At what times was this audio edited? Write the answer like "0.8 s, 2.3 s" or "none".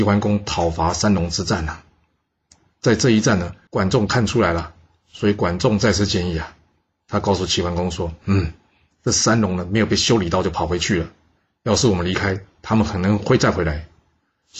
3.7 s